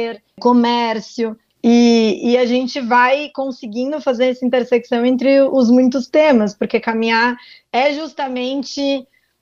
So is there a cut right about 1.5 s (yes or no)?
yes